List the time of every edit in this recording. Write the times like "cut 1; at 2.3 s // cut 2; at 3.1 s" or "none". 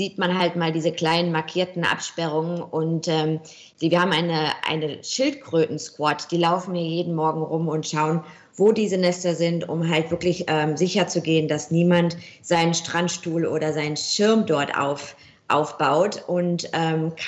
none